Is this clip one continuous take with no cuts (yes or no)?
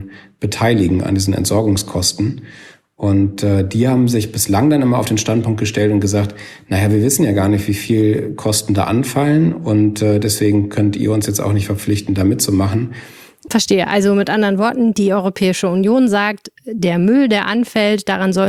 no